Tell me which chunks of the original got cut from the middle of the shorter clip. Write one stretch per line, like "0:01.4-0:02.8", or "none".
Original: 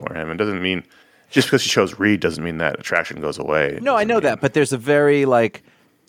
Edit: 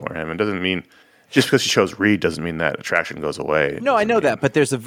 none